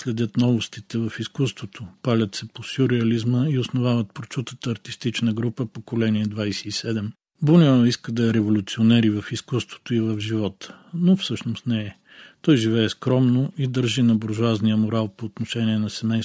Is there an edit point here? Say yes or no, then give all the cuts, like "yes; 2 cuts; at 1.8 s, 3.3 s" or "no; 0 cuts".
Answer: no; 0 cuts